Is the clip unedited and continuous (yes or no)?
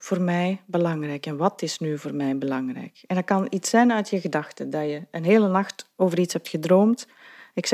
yes